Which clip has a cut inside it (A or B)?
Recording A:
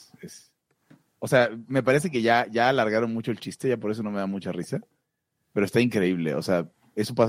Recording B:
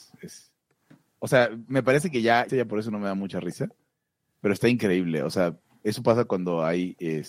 B